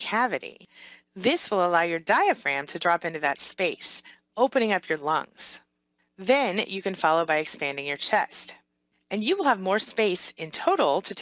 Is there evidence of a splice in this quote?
no; 0 cuts

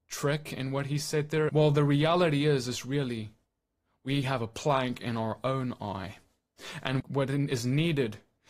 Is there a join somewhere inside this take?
yes; 2 cuts; at 1.5 s, 7.0 s

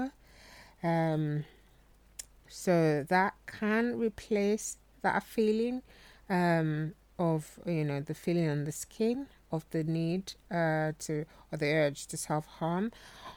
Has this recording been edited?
yes; 1 cut; at 2.5 s

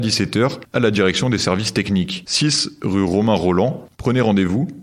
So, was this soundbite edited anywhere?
no; 0 cuts

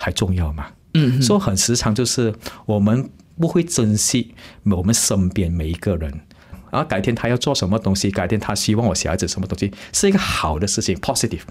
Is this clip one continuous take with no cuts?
no; 1 cut; at 6.5 s

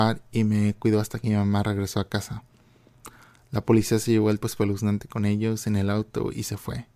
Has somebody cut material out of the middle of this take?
yes; 1 cut; at 4.4 s

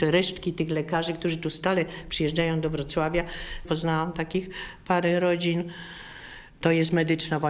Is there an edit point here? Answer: yes; 1 cut; at 3.6 s

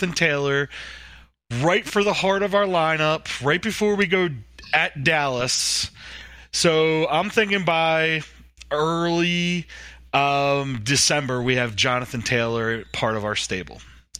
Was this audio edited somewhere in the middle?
no; 0 cuts

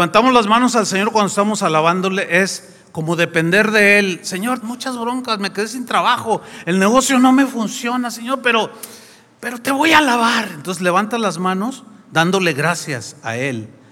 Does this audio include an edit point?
yes; 1 cut; at 4.6 s

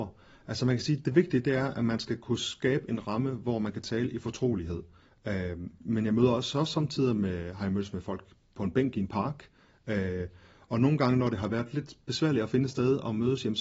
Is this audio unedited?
yes; 0 cuts

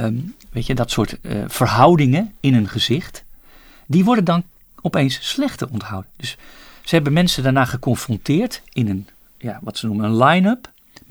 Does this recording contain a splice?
no; 0 cuts

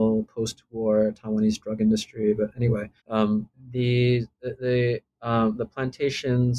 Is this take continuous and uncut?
no; 1 cut; at 3.0 s

